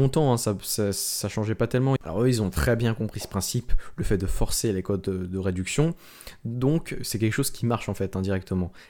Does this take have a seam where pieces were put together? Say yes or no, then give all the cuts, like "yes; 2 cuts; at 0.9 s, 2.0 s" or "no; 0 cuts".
yes; 1 cut; at 2.0 s